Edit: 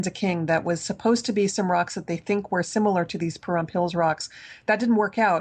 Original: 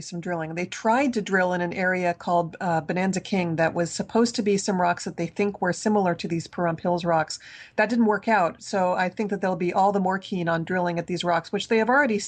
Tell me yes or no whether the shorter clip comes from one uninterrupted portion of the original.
yes